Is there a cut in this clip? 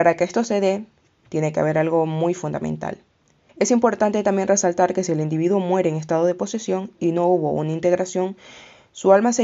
yes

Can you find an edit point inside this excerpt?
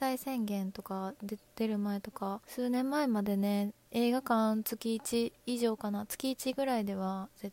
yes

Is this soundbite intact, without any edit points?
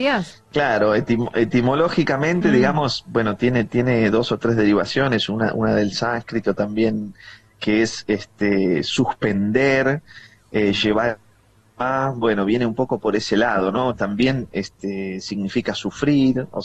yes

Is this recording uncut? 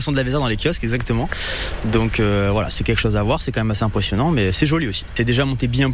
yes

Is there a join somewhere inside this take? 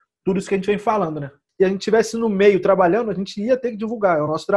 yes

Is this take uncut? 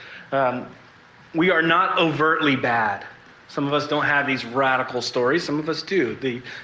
yes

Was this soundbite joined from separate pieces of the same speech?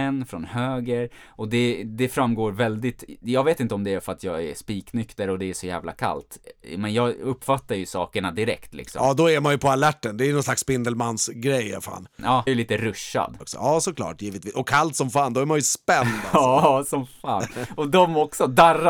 yes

